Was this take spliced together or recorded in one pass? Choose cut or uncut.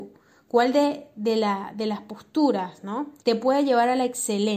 cut